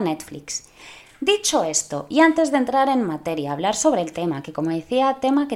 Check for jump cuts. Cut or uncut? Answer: uncut